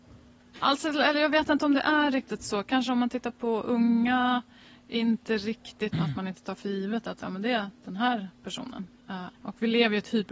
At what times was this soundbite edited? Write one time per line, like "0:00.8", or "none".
0:05.9
0:09.3